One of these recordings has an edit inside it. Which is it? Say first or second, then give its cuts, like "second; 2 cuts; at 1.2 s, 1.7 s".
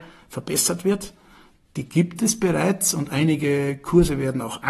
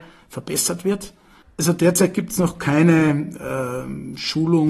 second; 1 cut; at 1.4 s